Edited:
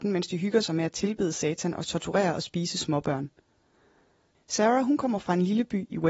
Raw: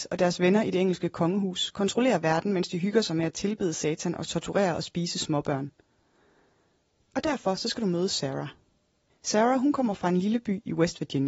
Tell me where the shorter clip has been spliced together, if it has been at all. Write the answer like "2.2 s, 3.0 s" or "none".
4.3 s